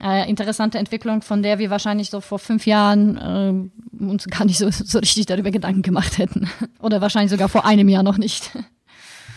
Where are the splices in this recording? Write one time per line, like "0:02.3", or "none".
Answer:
0:02.2
0:06.7